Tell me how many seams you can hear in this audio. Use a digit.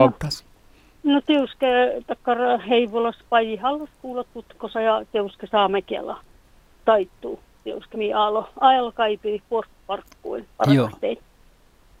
2